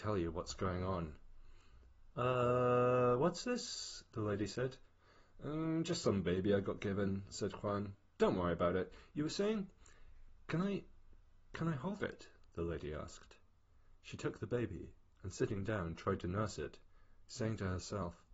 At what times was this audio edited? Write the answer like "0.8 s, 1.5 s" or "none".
2.1 s